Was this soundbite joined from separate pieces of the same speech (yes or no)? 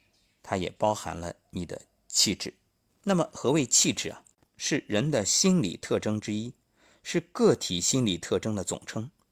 yes